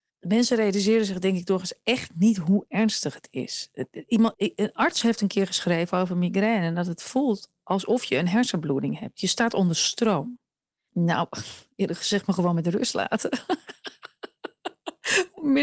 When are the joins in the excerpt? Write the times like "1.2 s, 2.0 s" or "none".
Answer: 4.3 s, 10.9 s